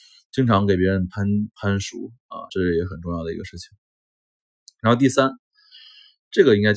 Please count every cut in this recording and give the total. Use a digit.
1